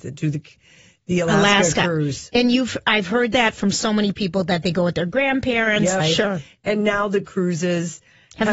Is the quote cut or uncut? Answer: cut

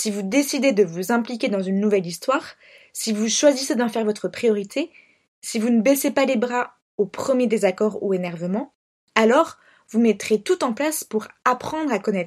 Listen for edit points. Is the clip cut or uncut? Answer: uncut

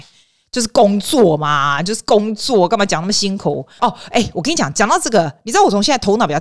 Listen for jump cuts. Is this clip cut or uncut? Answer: cut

